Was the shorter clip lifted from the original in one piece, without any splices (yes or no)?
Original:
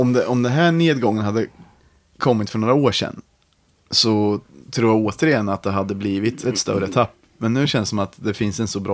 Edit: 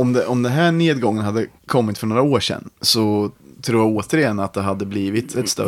no